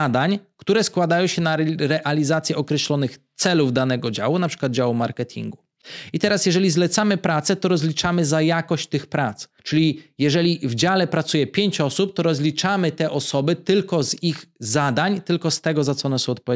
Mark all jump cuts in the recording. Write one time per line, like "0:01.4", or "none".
0:09.6